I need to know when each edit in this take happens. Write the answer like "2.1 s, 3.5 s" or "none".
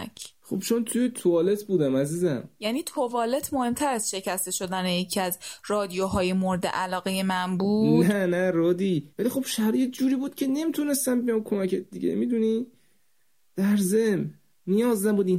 9.1 s